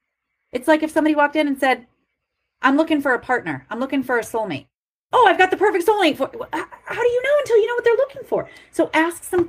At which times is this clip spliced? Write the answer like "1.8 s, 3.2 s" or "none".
none